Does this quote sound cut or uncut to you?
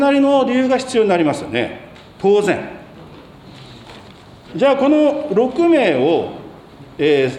cut